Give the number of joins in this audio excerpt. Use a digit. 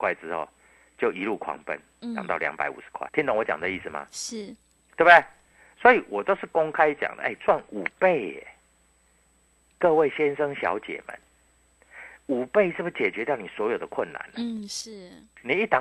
1